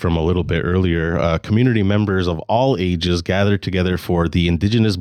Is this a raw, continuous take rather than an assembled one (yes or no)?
yes